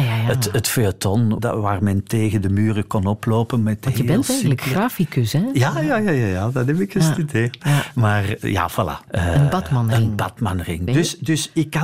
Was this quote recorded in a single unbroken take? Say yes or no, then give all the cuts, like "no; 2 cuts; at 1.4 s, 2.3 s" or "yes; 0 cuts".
no; 3 cuts; at 1.4 s, 9.1 s, 10.9 s